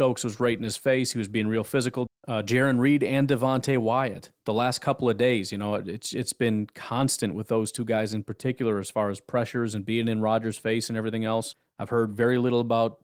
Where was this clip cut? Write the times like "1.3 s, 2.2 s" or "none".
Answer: 2.1 s